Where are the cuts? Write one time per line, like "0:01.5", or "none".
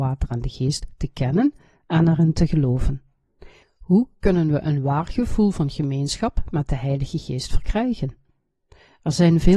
0:03.6